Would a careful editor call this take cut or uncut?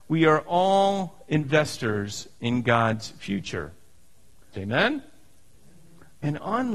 cut